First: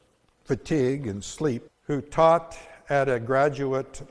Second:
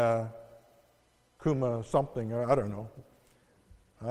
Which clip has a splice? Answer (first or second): first